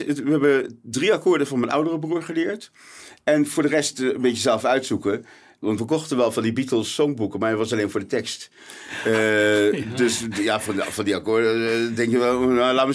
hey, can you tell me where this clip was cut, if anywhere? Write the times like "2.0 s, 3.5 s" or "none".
none